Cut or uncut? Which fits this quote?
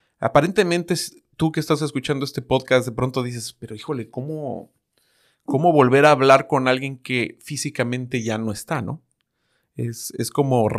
uncut